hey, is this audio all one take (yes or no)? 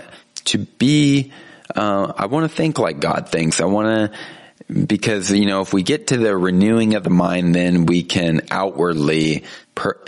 yes